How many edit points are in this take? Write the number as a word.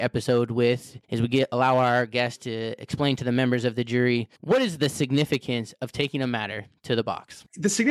two